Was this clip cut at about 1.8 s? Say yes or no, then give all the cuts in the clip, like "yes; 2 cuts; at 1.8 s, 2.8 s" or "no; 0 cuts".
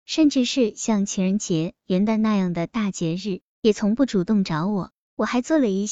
yes; 1 cut; at 1.8 s